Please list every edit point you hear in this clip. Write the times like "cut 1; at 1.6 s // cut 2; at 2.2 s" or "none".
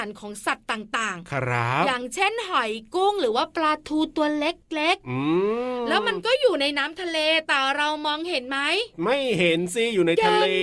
none

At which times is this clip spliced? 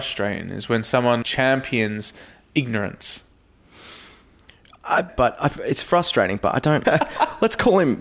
cut 1; at 1.2 s // cut 2; at 5.1 s // cut 3; at 6.8 s

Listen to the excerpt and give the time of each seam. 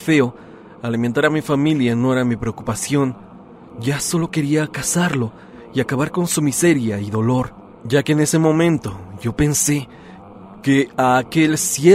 none

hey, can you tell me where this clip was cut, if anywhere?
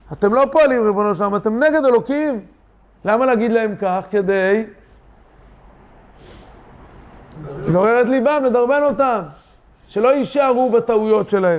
none

